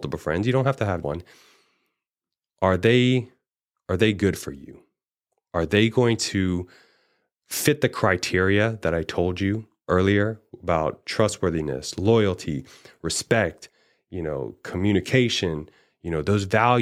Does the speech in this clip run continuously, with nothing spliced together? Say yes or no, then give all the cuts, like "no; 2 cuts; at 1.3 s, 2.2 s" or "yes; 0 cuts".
no; 1 cut; at 1.0 s